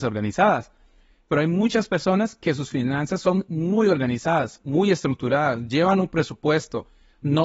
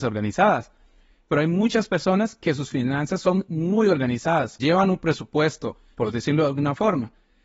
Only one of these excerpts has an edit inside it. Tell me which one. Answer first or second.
second